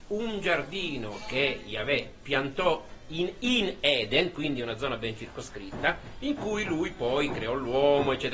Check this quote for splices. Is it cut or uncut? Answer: uncut